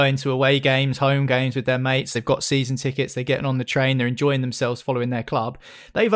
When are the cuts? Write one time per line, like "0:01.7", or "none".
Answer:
none